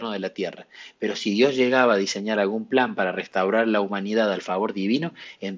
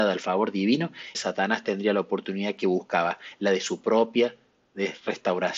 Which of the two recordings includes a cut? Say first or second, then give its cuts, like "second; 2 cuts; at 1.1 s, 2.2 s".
second; 1 cut; at 1.1 s